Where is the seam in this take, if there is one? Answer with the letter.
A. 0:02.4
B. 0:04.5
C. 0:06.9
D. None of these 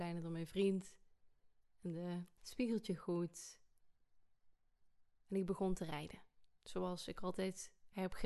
A